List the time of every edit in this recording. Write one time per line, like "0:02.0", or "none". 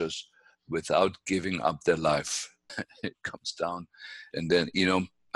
0:02.7
0:04.3